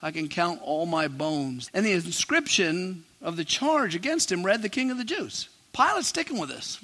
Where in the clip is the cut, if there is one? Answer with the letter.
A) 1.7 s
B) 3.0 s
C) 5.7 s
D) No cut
A